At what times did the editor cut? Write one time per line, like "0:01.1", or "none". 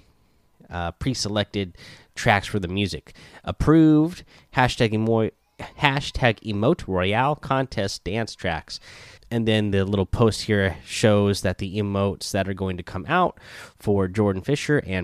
0:05.7
0:09.2